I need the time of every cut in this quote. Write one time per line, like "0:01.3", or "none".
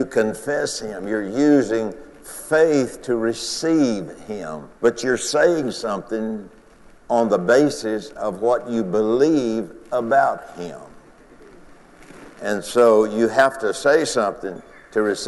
0:04.8